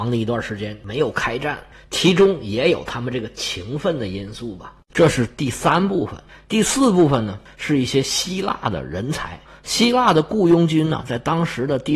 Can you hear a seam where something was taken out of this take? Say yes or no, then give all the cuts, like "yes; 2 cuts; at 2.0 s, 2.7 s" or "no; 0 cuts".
yes; 1 cut; at 4.9 s